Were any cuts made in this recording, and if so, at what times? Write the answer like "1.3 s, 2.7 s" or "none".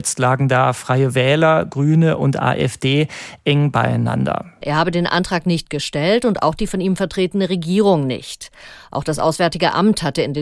4.6 s